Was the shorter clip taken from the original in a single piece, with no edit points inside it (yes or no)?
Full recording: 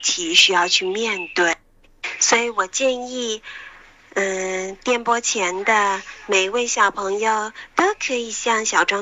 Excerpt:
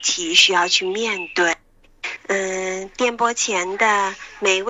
no